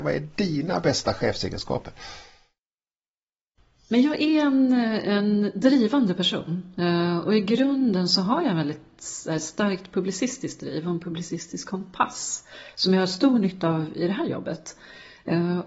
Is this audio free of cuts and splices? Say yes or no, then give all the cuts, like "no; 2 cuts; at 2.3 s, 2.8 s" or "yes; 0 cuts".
yes; 0 cuts